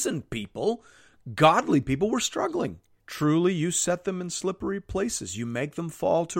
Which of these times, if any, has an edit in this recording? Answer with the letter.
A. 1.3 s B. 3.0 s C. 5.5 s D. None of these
B